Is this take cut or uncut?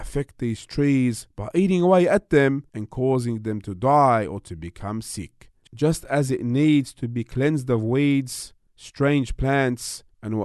cut